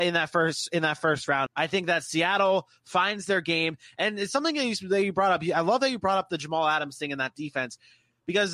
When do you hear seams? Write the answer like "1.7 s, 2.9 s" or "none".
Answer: 1.5 s